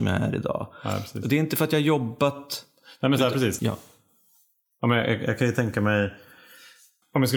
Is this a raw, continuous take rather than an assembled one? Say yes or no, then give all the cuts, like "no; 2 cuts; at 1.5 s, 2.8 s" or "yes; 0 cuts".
no; 1 cut; at 3.6 s